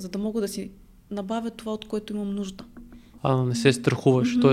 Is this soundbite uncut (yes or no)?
no